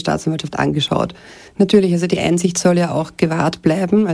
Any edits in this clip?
yes; 1 cut; at 1.5 s

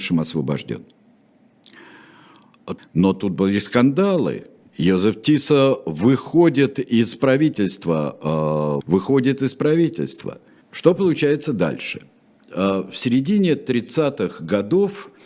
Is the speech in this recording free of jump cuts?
no; 3 cuts; at 2.8 s, 8.8 s, 10.6 s

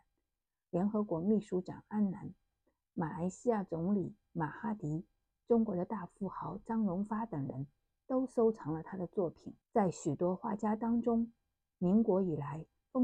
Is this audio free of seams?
no; 1 cut; at 9.6 s

